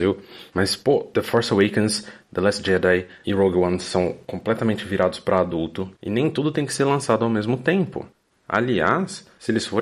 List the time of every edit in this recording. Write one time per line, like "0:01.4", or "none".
0:06.0

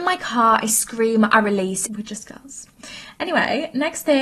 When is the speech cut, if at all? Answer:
0:01.9

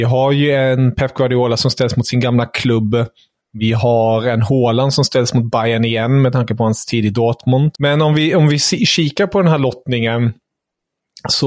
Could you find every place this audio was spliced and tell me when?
0:07.7

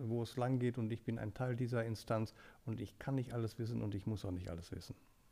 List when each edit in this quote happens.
none

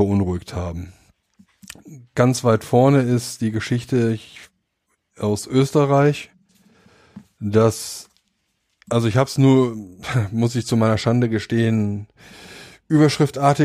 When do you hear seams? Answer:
none

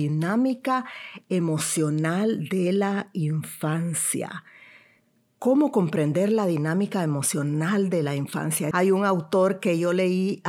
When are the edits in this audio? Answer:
0:08.7

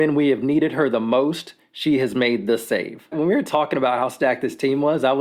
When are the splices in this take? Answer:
0:03.1

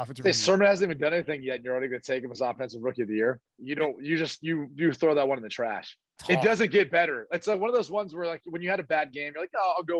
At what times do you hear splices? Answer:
0:03.5
0:06.2

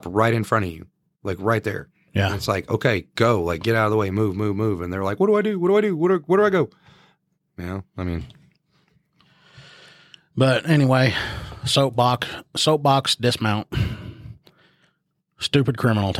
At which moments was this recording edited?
none

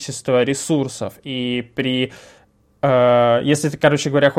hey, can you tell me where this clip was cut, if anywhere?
none

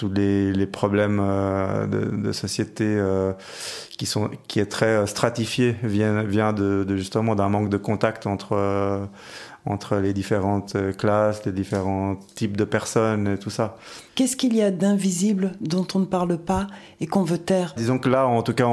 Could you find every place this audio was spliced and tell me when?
0:14.1
0:17.8

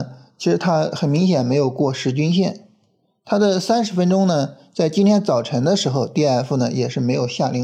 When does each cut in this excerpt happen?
none

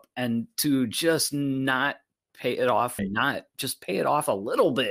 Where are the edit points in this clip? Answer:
0:03.0

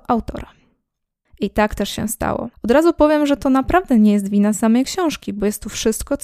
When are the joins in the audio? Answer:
0:01.3
0:02.5

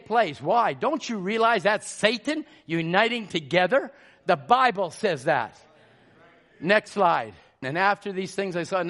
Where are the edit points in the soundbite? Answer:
0:07.6

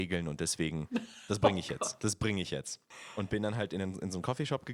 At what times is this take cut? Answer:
none

